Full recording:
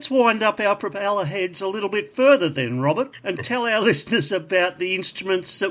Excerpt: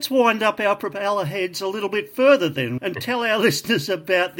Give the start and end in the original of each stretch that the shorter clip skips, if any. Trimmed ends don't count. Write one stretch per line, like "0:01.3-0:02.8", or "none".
0:02.8-0:03.2